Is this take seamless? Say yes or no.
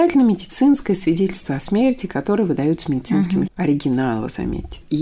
no